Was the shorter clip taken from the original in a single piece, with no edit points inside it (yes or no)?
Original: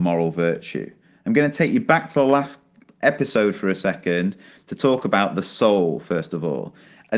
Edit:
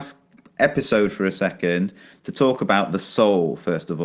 yes